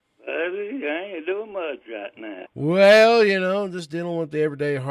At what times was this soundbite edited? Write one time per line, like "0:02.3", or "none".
0:02.5